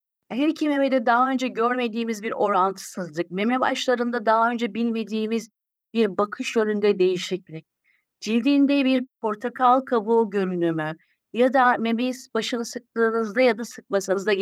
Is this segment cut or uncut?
uncut